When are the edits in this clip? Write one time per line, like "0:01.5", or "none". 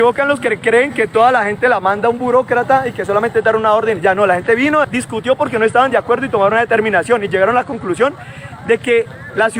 0:04.8